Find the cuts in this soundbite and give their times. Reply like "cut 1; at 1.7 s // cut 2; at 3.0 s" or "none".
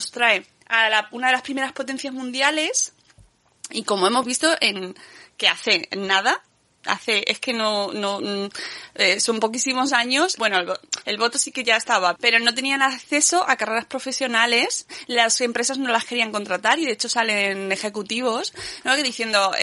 cut 1; at 10.4 s // cut 2; at 12.2 s